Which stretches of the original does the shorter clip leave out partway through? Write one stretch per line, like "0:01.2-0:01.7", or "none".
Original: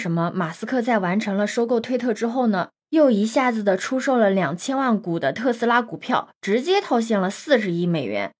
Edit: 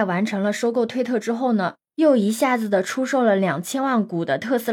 none